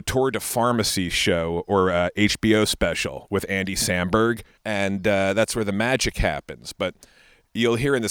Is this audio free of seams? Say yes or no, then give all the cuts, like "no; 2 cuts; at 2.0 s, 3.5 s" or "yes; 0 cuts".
no; 1 cut; at 4.6 s